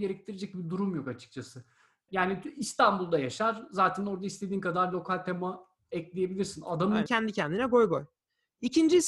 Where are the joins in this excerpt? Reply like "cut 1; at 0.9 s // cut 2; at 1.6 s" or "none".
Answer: cut 1; at 2.1 s // cut 2; at 7.1 s